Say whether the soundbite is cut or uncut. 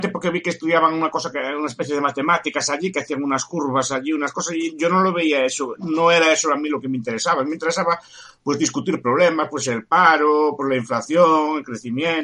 uncut